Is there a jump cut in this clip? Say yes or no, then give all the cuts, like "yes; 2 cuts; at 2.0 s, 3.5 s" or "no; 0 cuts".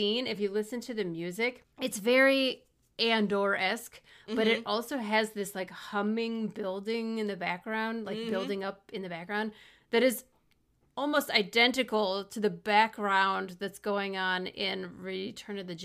no; 0 cuts